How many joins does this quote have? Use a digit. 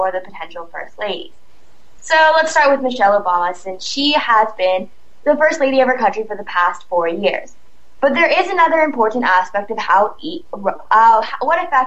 2